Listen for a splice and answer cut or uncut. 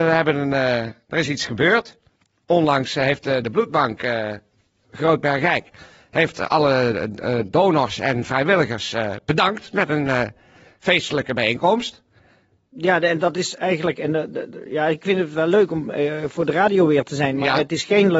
uncut